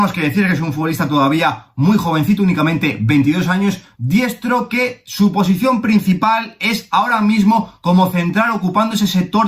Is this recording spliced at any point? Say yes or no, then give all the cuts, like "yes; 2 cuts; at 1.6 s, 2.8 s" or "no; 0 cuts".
yes; 1 cut; at 3.9 s